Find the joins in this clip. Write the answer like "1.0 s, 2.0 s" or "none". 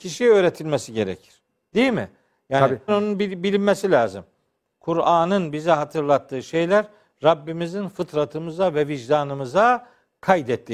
2.9 s, 4.7 s